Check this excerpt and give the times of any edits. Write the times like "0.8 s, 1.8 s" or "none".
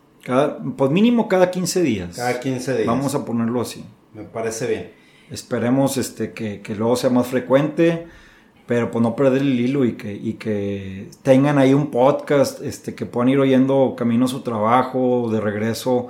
none